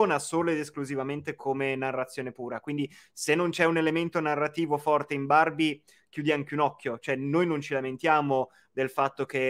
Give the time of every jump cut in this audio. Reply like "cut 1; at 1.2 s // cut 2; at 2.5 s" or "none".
none